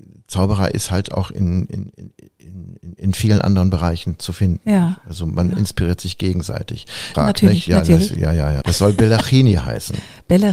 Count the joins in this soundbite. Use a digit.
2